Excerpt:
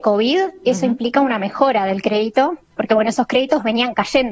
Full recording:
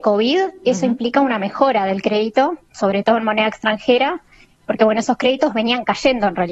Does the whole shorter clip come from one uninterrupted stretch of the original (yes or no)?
no